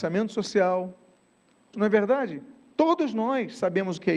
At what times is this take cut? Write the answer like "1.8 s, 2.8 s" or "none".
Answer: 1.7 s